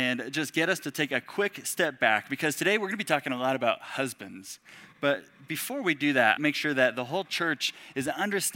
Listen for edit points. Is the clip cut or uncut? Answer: cut